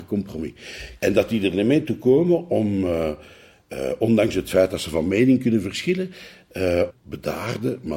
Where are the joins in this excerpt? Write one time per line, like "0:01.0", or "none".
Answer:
0:01.0
0:06.9